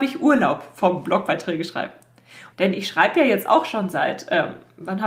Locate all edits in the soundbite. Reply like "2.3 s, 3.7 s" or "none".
2.5 s